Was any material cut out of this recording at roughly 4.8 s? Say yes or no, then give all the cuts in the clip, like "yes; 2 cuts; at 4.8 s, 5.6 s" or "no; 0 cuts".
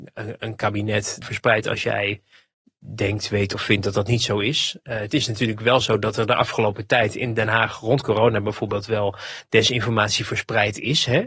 no; 1 cut; at 1.2 s